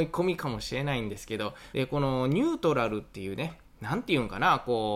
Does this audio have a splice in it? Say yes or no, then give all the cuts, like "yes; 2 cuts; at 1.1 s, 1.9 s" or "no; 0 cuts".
yes; 1 cut; at 1.7 s